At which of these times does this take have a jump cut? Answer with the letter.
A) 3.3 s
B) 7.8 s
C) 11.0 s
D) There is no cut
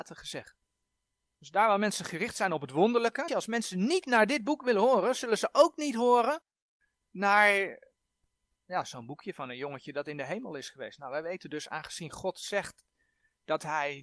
A